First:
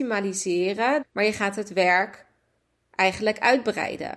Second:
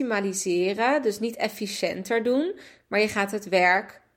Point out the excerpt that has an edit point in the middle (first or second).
first